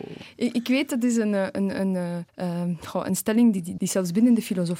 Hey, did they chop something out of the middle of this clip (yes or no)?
yes